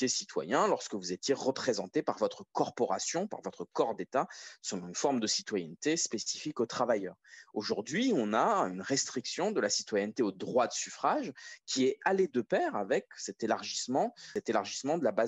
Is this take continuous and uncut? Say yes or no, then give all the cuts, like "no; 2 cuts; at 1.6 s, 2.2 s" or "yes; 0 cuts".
yes; 0 cuts